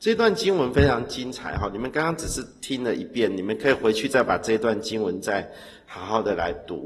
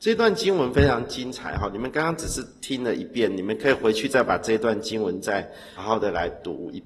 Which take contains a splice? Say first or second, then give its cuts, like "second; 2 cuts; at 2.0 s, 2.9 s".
second; 1 cut; at 5.8 s